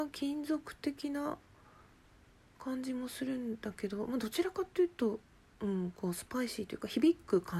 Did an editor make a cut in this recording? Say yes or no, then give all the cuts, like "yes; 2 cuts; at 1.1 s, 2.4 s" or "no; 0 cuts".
no; 0 cuts